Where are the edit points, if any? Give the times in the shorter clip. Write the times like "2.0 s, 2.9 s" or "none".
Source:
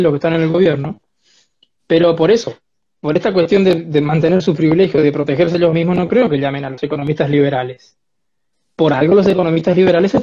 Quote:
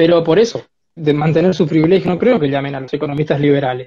1.0 s, 2.0 s